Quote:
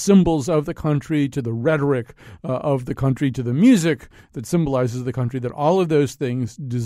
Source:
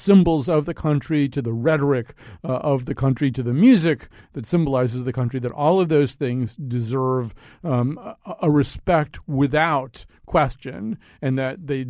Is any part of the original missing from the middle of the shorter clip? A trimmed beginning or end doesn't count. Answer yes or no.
no